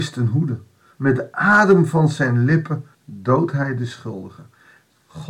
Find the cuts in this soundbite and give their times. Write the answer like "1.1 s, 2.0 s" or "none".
0.9 s, 2.9 s